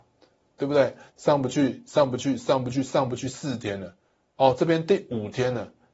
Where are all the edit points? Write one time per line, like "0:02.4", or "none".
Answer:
0:01.1